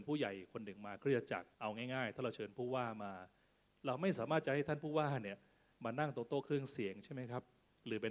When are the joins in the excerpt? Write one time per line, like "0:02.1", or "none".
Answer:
0:01.5